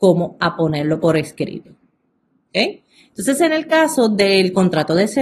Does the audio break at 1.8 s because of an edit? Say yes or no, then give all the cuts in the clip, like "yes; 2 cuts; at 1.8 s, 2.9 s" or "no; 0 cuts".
no; 0 cuts